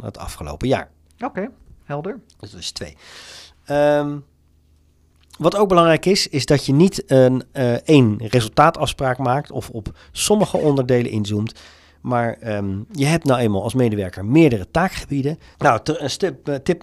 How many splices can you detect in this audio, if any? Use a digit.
1